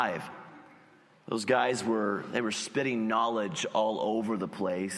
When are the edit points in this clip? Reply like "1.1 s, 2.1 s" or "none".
1.1 s